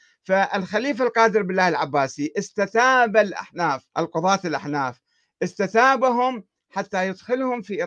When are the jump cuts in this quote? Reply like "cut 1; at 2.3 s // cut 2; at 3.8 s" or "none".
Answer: cut 1; at 3.9 s